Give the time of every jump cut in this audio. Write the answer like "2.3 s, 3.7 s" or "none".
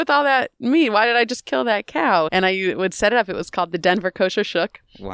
2.3 s